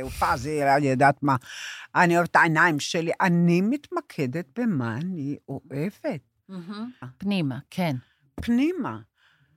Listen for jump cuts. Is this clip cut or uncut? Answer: cut